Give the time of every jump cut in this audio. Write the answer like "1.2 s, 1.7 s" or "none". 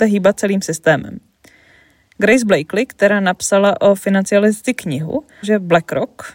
5.4 s